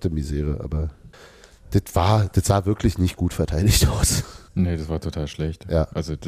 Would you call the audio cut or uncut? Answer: cut